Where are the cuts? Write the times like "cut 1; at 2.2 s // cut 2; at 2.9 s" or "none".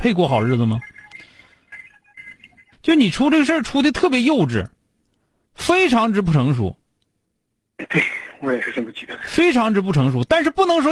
cut 1; at 2.7 s